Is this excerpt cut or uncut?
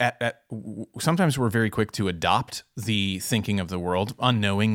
uncut